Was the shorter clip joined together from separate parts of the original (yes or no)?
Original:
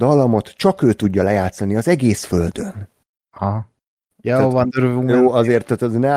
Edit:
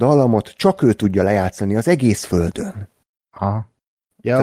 no